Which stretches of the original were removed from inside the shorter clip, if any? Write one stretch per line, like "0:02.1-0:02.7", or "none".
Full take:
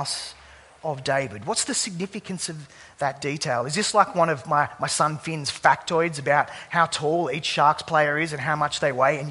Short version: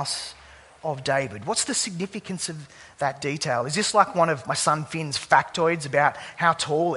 0:04.4-0:04.8